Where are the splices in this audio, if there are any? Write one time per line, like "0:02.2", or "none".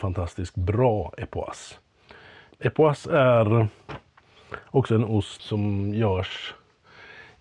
0:02.5
0:05.4